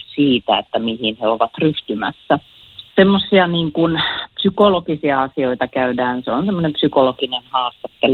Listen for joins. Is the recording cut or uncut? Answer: cut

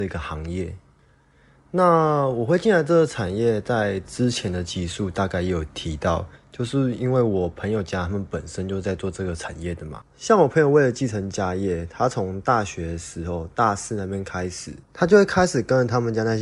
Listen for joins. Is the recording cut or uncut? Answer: cut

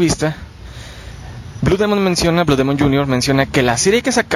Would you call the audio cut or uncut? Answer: uncut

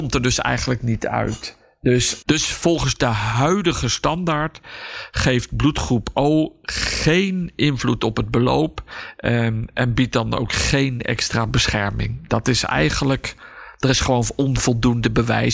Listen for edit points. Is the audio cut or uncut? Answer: cut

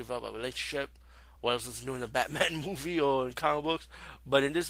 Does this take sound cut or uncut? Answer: uncut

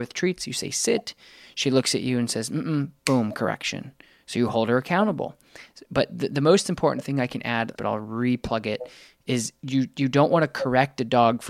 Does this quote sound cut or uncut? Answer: cut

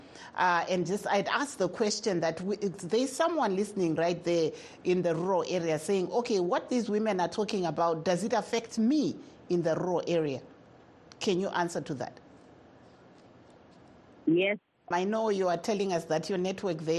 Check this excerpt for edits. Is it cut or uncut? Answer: cut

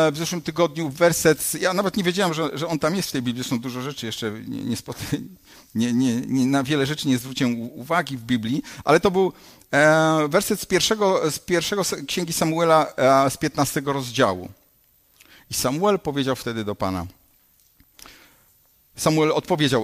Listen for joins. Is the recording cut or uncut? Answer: uncut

